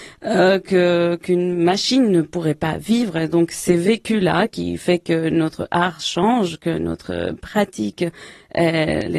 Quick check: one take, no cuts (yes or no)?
yes